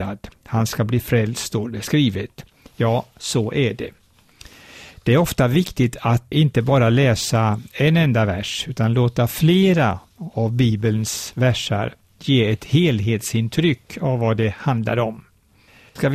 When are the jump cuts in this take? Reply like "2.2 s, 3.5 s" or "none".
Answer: 6.3 s